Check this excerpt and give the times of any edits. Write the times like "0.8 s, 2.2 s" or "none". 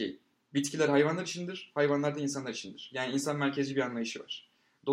none